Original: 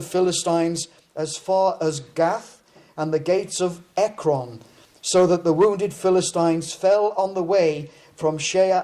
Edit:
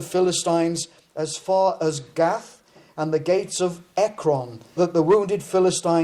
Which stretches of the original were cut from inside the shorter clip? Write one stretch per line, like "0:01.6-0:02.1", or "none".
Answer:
0:04.8-0:05.3